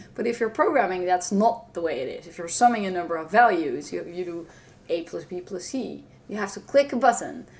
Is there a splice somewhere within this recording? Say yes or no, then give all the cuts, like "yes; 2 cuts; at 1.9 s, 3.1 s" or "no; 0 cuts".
no; 0 cuts